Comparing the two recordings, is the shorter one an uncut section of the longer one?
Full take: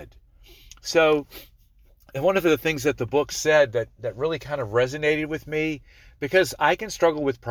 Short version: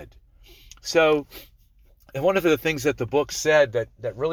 yes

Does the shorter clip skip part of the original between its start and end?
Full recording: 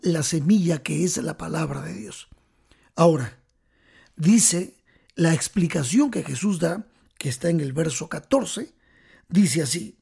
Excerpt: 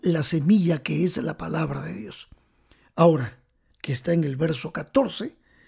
yes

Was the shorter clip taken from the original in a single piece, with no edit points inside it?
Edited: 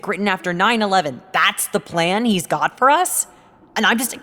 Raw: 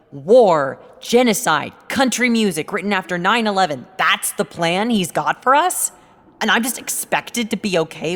yes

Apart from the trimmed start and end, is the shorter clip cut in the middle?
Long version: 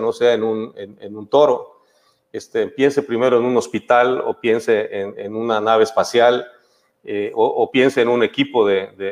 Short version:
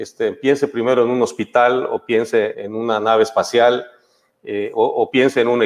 yes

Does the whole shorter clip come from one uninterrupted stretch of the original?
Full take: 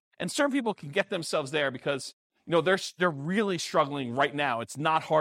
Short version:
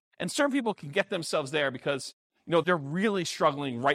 no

